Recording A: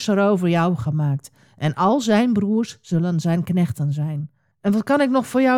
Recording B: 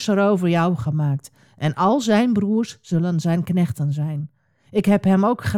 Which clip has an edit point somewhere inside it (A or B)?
A